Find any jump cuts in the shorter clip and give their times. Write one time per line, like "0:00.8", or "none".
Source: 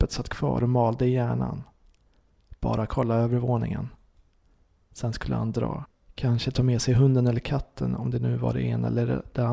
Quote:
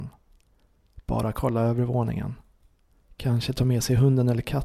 0:03.0